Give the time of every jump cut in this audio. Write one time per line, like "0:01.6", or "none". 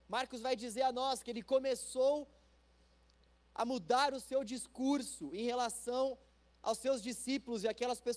none